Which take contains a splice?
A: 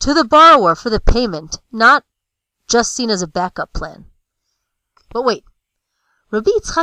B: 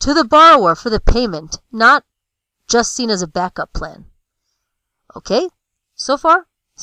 A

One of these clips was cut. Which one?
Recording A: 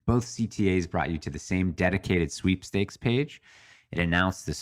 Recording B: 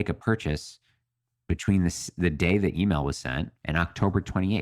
B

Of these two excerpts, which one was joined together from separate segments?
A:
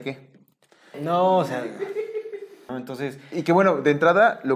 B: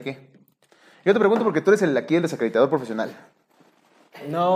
A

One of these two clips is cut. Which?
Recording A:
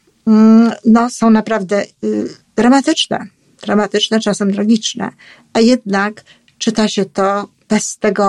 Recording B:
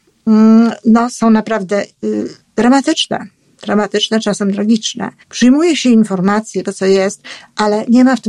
B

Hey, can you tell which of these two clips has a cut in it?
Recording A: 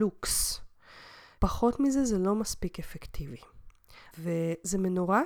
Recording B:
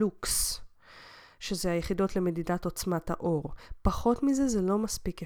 A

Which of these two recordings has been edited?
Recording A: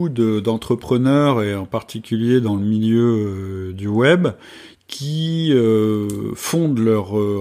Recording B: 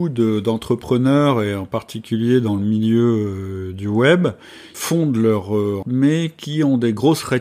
B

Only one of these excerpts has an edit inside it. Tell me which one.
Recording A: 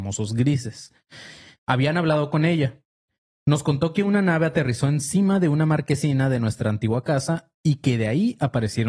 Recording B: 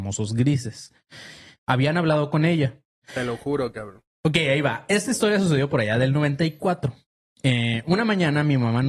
B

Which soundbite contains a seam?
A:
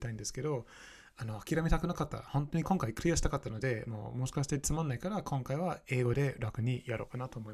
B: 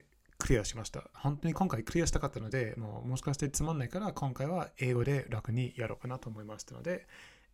B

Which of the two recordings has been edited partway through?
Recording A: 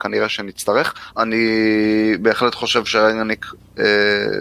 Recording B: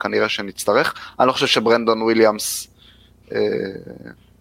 A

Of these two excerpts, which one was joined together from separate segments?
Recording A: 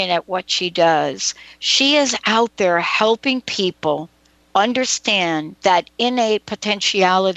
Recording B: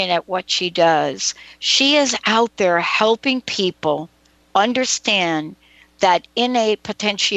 A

